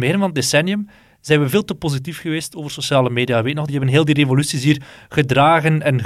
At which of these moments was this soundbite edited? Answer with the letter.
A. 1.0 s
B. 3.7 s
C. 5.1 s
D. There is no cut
B